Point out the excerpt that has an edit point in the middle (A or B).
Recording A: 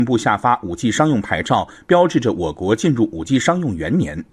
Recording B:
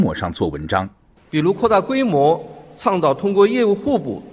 B